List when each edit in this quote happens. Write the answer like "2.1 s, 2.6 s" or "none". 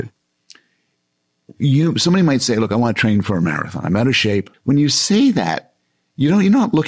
4.5 s